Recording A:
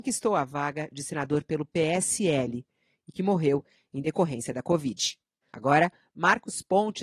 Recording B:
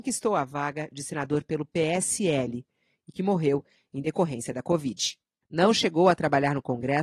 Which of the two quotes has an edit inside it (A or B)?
A